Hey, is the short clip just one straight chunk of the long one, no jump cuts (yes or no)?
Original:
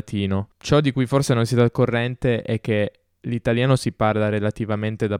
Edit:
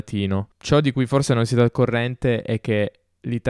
yes